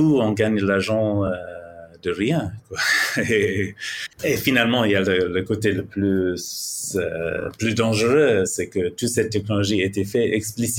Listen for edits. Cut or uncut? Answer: uncut